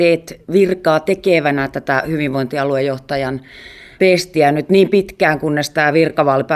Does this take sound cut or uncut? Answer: uncut